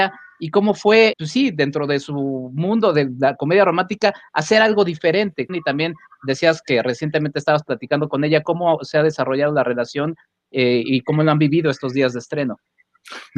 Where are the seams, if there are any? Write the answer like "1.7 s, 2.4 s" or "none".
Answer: 1.1 s, 5.5 s